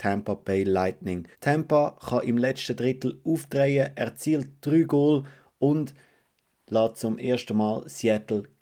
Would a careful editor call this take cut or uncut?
cut